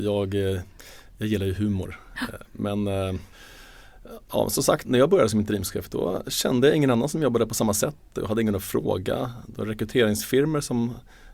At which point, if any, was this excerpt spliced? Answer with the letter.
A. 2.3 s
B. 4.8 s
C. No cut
B